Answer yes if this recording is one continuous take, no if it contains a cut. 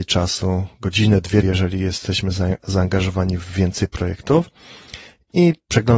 no